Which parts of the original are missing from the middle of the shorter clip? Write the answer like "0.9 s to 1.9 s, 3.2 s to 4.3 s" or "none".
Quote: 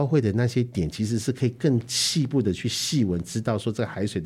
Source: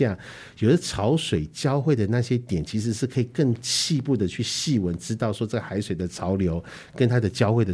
none